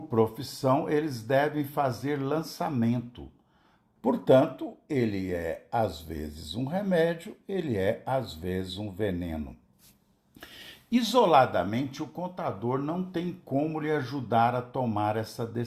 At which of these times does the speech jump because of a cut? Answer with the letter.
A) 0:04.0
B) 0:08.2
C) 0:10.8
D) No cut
A